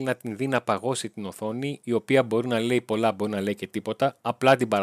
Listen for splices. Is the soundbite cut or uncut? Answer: cut